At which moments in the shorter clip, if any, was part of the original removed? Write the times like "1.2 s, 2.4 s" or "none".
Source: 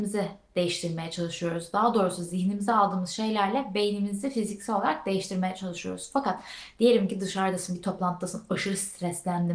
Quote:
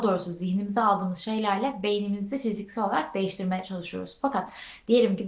none